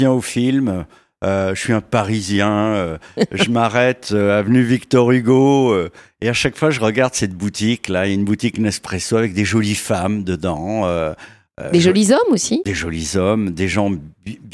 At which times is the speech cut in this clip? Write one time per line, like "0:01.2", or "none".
none